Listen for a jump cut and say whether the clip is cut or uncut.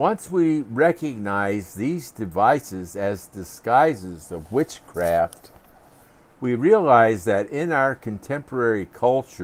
uncut